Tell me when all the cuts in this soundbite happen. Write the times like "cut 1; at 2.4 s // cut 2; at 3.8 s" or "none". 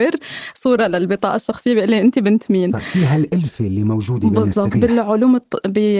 cut 1; at 4.7 s